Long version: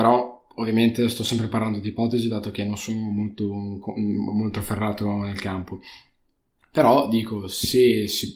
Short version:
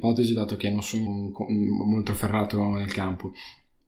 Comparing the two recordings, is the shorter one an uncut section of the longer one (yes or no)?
no